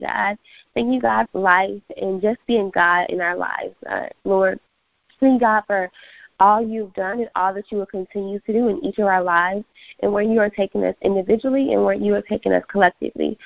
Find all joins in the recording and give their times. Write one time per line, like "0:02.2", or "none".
0:01.3